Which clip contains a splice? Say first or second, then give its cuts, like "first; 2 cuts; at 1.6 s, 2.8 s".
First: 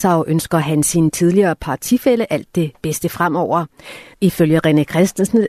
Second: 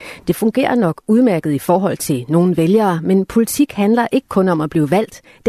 first; 1 cut; at 4.1 s